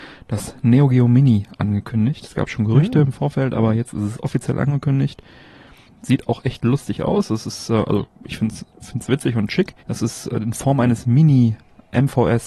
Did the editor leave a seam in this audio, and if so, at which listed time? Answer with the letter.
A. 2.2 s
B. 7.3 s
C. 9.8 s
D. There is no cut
C